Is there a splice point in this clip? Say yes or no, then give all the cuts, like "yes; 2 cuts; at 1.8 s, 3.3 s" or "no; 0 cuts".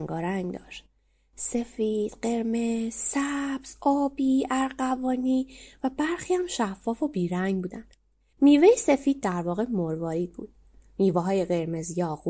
no; 0 cuts